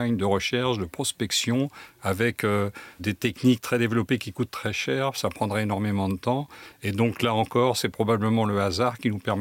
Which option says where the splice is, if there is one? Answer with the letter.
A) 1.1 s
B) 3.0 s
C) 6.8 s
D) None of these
B